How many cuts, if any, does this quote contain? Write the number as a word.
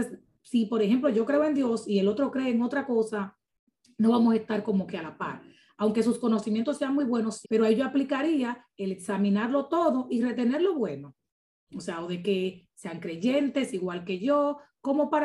two